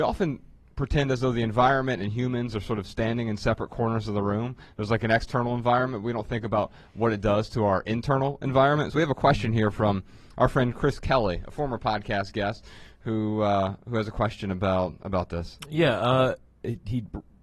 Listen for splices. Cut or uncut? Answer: uncut